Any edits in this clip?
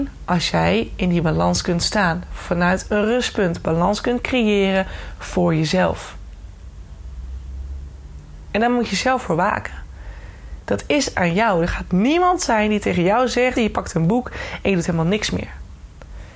yes; 1 cut; at 13.6 s

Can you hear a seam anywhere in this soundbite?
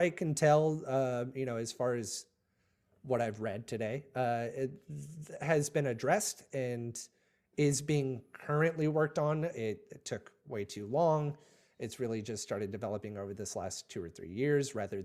no; 0 cuts

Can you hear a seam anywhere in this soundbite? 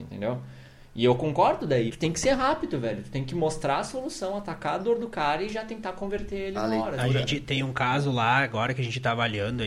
yes; 1 cut; at 1.9 s

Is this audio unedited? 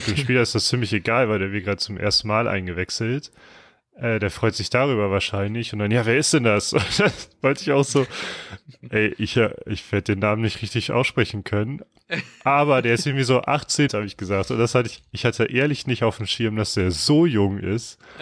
no; 1 cut; at 13.9 s

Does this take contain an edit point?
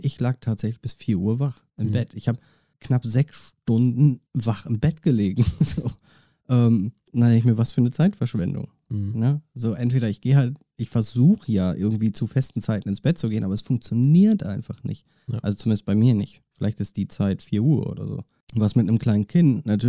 no; 0 cuts

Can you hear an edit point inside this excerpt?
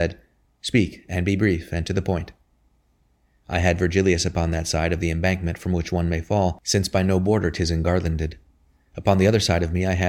no; 0 cuts

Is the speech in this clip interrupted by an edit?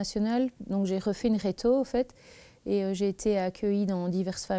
no; 0 cuts

